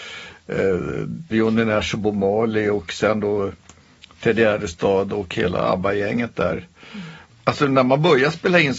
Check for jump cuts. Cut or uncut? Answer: cut